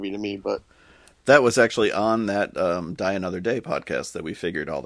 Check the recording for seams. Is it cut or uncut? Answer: uncut